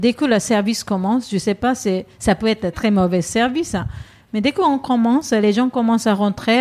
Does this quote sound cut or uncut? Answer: cut